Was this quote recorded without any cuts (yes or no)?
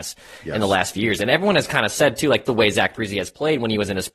no